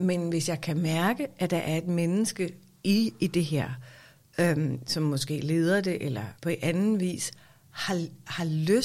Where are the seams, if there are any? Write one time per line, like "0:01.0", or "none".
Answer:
0:06.4